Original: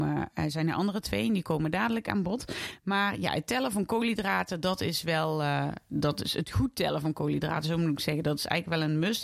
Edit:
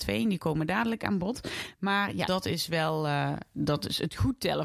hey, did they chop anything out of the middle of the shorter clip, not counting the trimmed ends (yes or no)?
yes